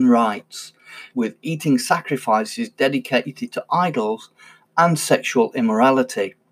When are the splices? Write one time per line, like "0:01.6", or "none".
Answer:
0:01.1